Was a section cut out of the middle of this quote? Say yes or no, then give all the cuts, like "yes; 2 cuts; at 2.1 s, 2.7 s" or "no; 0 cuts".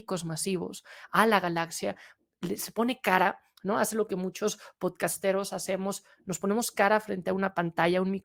no; 0 cuts